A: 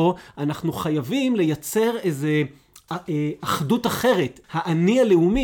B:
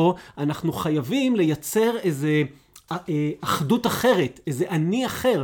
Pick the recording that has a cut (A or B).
A